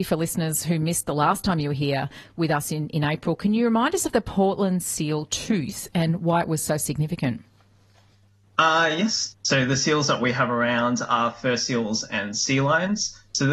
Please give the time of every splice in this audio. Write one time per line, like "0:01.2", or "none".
0:09.3